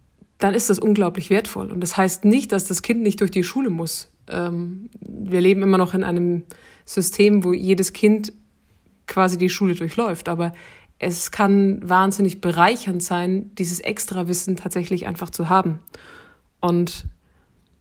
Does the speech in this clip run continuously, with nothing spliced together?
yes; 0 cuts

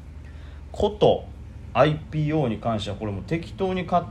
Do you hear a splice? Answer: no; 0 cuts

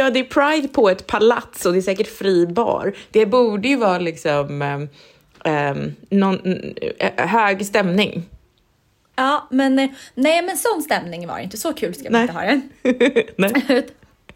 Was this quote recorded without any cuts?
no; 1 cut; at 3.1 s

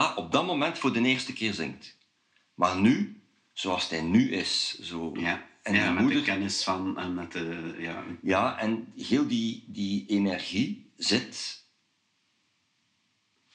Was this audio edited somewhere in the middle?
no; 0 cuts

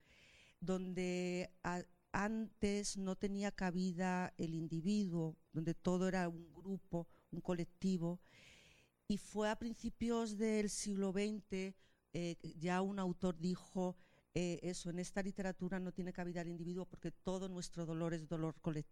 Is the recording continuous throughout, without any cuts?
yes; 0 cuts

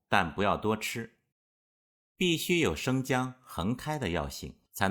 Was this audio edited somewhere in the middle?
yes; 1 cut; at 1.3 s

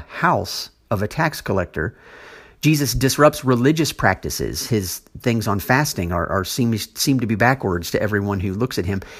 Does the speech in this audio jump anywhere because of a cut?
no; 0 cuts

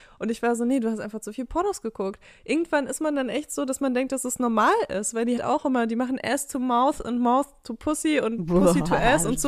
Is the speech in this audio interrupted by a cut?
yes; 1 cut; at 5.4 s

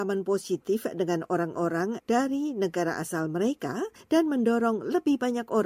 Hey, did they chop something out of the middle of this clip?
no; 0 cuts

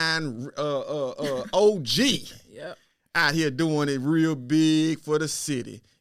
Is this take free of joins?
yes; 0 cuts

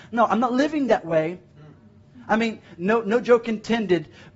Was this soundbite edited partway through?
yes; 2 cuts; at 1.5 s, 2.8 s

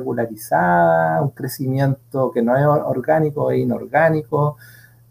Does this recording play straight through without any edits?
yes; 0 cuts

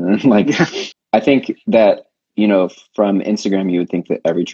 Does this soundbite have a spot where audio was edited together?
yes; 1 cut; at 0.9 s

